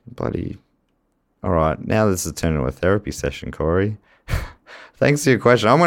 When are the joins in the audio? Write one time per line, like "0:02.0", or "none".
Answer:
none